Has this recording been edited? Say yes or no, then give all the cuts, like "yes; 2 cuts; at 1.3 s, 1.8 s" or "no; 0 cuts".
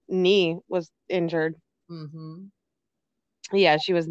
no; 0 cuts